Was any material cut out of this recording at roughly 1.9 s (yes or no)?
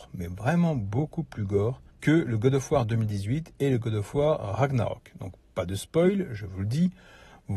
yes